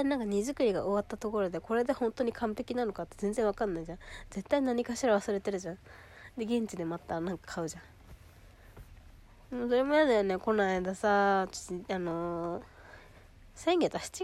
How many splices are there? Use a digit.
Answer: 0